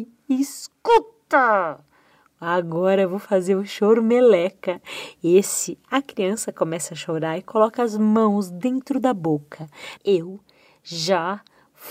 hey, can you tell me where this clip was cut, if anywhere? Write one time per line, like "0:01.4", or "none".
0:10.0